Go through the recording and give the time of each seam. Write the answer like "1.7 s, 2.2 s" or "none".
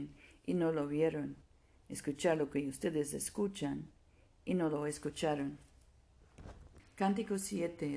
6.8 s